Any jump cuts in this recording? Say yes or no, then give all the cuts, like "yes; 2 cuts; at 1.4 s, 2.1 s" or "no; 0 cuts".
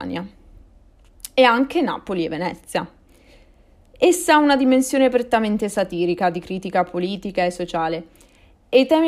no; 0 cuts